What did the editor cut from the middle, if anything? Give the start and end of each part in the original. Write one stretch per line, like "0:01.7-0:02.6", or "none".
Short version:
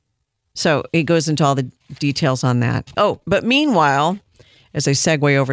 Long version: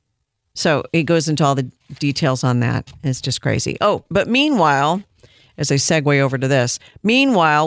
0:02.9-0:03.8